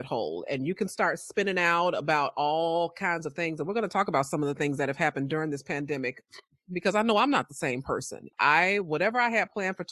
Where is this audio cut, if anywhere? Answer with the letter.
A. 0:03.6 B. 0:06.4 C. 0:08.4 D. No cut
D